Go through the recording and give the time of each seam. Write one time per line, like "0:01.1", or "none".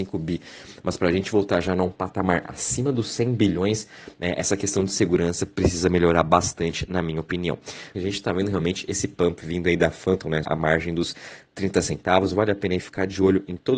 0:07.9
0:10.4